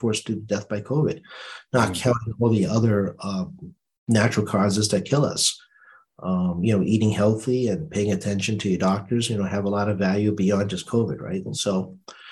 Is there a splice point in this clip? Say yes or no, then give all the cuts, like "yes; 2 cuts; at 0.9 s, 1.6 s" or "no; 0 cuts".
no; 0 cuts